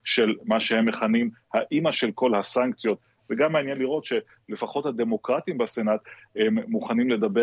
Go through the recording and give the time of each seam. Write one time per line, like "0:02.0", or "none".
0:03.2